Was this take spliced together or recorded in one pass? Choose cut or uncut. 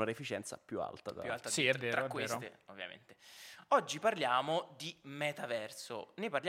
uncut